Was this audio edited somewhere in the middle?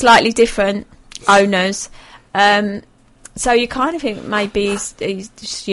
no; 0 cuts

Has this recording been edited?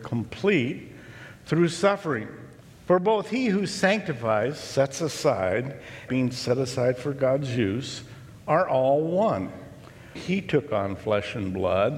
yes; 2 cuts; at 6.1 s, 10.1 s

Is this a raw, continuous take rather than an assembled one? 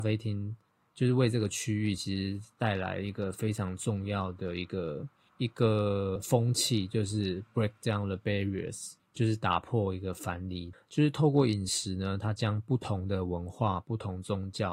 no; 1 cut; at 10.7 s

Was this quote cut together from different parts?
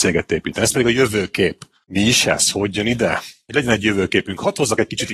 no; 0 cuts

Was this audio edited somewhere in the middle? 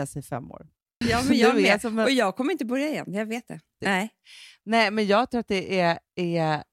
yes; 2 cuts; at 1.0 s, 3.8 s

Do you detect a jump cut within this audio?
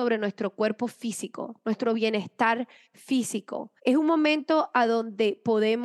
yes; 1 cut; at 3.8 s

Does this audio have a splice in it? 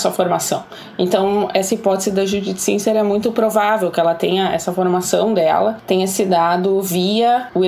yes; 1 cut; at 1.5 s

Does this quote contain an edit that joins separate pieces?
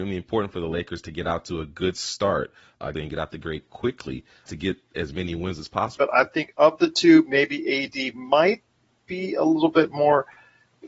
yes; 2 cuts; at 2.9 s, 6.0 s

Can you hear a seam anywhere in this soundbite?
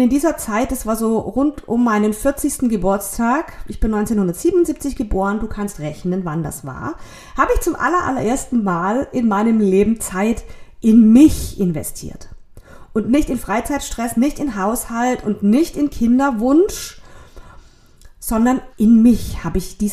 yes; 1 cut; at 18.7 s

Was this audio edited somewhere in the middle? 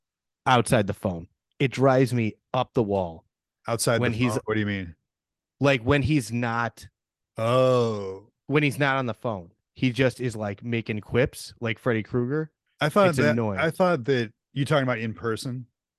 no; 0 cuts

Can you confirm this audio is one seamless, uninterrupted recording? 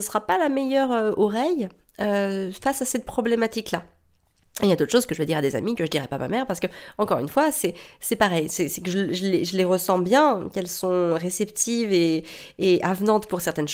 yes; 0 cuts

